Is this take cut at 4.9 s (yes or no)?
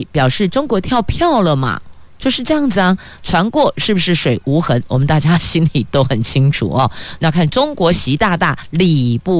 no